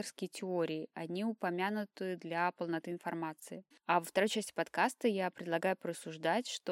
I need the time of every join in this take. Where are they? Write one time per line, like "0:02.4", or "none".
0:03.7